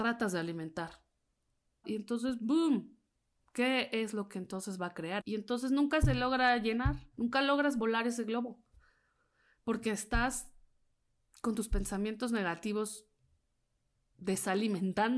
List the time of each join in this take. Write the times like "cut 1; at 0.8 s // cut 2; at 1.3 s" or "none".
cut 1; at 1.8 s // cut 2; at 5.2 s // cut 3; at 7.1 s